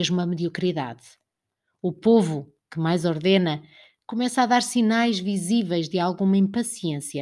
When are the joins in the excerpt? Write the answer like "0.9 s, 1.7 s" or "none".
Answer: none